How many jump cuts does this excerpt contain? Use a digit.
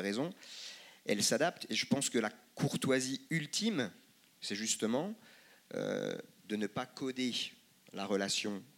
0